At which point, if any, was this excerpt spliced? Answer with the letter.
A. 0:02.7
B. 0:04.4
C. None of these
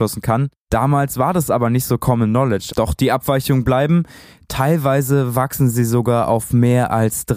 A